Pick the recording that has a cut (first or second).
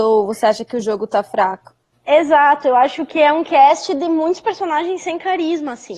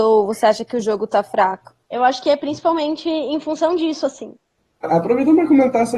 second